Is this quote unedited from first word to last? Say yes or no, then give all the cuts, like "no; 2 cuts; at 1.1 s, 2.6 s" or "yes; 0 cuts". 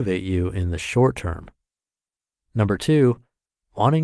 yes; 0 cuts